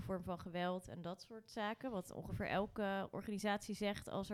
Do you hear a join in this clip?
no; 0 cuts

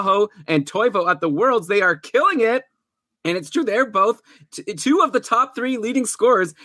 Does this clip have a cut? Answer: no; 0 cuts

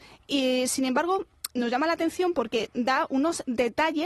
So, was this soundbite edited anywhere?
yes; 1 cut; at 1.5 s

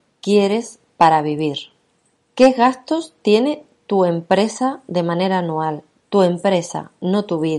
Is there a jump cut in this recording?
yes; 1 cut; at 2.3 s

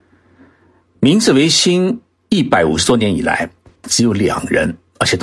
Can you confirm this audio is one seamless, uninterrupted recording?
no; 1 cut; at 3.8 s

